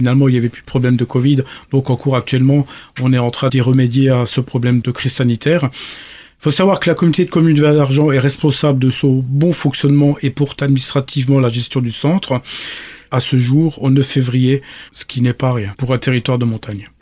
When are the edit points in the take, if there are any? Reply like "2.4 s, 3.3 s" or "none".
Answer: 14.9 s